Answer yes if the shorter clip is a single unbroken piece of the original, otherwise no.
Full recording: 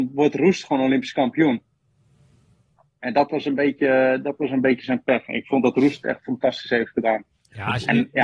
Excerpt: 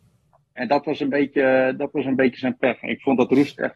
yes